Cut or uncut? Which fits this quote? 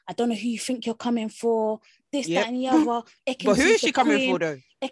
uncut